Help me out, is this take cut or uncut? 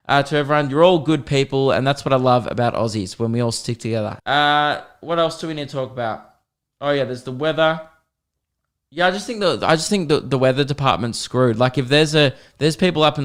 cut